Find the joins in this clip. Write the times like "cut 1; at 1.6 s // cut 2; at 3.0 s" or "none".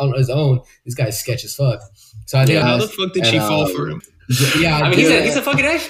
cut 1; at 2.6 s // cut 2; at 4.0 s